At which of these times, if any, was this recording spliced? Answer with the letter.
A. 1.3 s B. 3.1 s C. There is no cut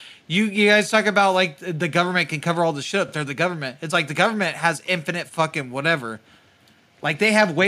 C